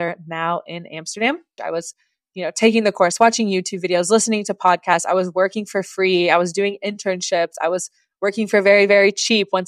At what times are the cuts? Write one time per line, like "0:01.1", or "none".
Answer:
0:01.6